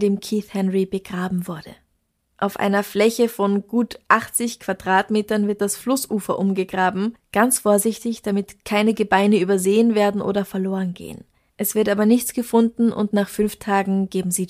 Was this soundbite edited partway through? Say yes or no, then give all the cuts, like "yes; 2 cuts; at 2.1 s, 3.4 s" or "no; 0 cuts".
no; 0 cuts